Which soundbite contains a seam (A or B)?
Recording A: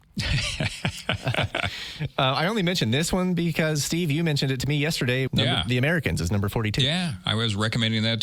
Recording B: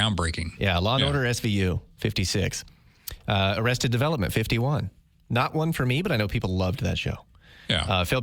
A